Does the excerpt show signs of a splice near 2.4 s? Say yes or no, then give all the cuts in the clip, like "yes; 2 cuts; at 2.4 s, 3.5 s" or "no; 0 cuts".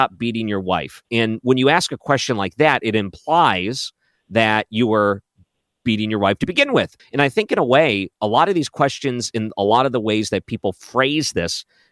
no; 1 cut; at 7.0 s